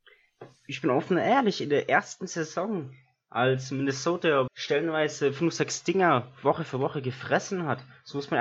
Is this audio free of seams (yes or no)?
no